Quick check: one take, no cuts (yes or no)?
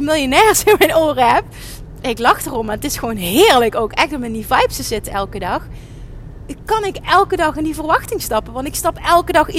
yes